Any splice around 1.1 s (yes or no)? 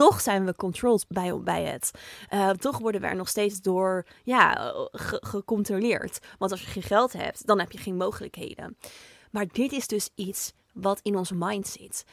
yes